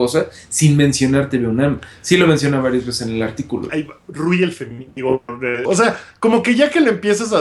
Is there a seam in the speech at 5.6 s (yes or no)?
yes